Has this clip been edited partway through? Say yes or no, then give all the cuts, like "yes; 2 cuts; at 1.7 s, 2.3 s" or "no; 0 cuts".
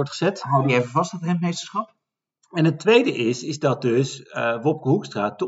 no; 0 cuts